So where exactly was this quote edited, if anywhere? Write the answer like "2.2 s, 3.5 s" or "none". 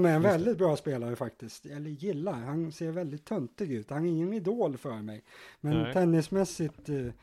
1.6 s, 3.9 s